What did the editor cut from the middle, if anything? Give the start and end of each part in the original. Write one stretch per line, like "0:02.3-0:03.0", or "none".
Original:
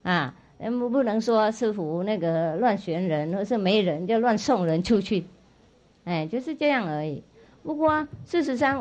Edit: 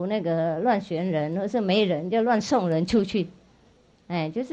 none